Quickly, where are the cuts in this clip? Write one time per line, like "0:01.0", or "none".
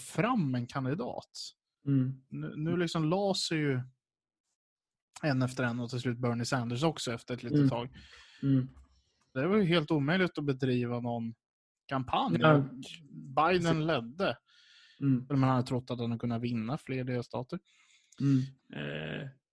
0:09.3
0:15.3
0:18.6